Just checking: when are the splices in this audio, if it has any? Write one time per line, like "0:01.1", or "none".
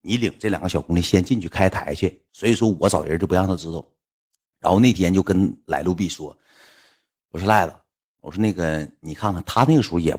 0:02.3